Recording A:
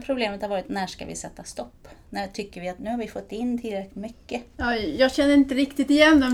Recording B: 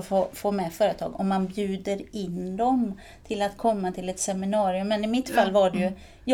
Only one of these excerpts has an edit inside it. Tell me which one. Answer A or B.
A